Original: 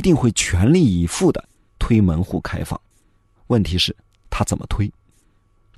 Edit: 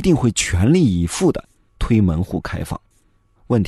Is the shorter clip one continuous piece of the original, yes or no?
yes